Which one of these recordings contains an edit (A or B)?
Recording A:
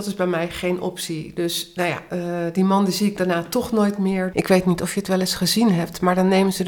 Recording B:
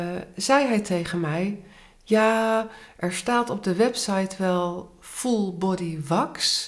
A